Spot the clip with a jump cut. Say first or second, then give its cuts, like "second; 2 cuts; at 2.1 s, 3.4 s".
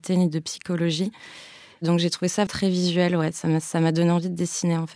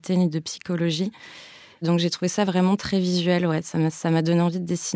first; 1 cut; at 2.5 s